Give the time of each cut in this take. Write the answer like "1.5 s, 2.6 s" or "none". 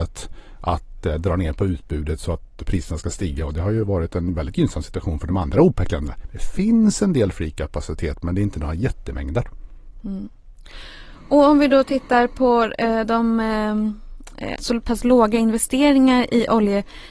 14.6 s